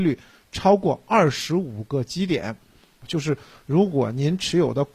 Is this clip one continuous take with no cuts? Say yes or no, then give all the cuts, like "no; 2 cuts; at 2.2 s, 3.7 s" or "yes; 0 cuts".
no; 1 cut; at 3.0 s